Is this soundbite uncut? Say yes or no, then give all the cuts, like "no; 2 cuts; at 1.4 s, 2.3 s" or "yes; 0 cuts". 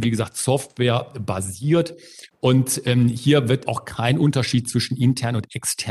no; 1 cut; at 3.6 s